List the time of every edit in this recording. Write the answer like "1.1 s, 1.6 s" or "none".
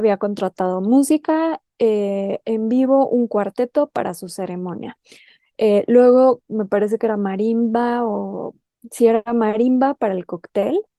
none